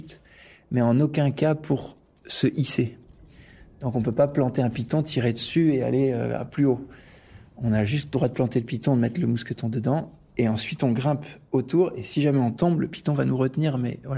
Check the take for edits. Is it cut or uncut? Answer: uncut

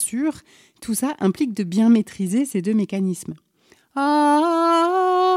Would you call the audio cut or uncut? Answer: cut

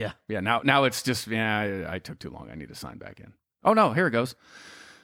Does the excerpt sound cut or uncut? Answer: uncut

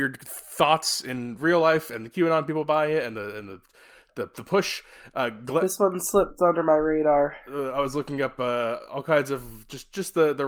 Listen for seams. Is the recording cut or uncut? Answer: uncut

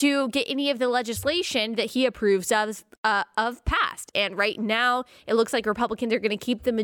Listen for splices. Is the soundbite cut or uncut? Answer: cut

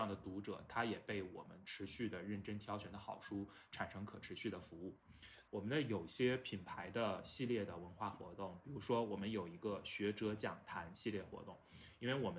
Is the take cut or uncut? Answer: cut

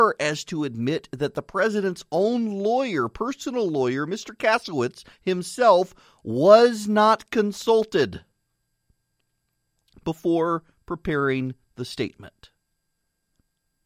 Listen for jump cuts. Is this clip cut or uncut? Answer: uncut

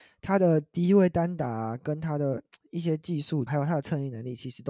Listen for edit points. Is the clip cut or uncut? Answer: cut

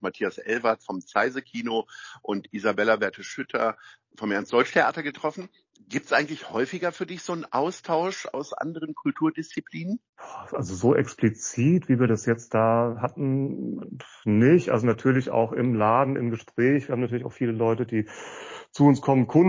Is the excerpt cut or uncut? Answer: cut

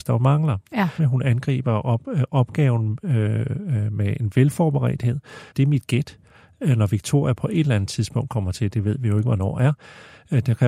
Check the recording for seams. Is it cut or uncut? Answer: cut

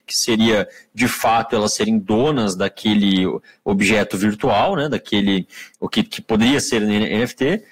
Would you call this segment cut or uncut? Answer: uncut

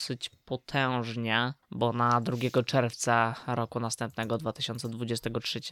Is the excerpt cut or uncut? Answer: cut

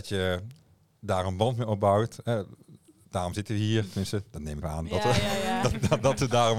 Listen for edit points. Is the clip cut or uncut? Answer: cut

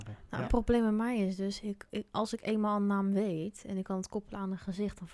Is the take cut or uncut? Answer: uncut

